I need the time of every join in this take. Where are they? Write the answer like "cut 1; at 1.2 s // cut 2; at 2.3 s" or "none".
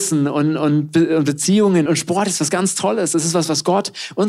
cut 1; at 1.9 s